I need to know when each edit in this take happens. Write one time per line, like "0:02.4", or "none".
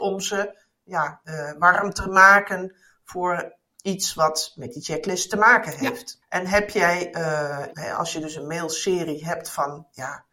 0:06.2
0:07.7